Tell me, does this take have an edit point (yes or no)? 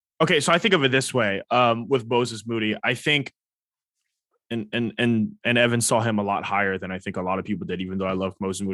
no